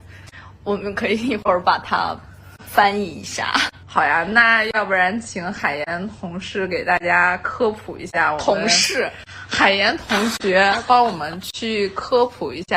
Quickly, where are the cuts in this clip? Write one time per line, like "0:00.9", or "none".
0:03.8